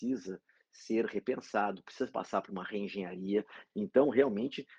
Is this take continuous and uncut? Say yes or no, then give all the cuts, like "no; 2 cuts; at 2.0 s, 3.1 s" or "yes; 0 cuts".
no; 1 cut; at 3.7 s